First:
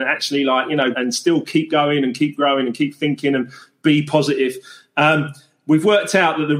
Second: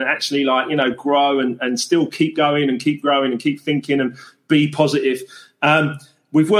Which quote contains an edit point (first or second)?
first